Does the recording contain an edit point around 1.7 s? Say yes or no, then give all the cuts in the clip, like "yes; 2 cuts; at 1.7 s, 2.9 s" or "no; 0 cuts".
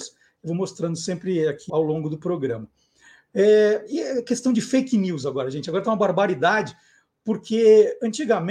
yes; 1 cut; at 1.7 s